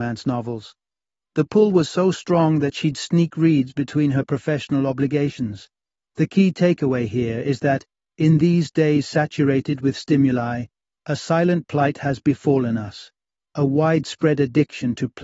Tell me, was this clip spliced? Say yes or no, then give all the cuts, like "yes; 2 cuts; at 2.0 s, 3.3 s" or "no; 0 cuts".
no; 0 cuts